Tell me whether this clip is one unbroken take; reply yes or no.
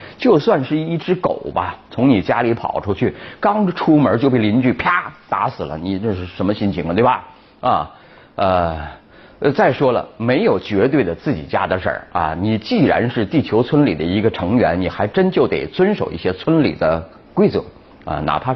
yes